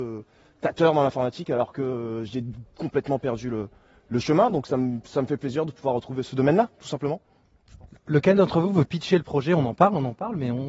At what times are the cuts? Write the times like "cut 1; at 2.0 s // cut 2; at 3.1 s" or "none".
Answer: none